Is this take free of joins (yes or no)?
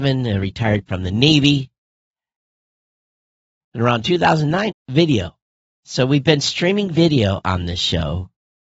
no